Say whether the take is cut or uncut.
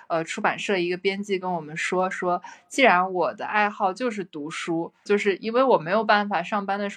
cut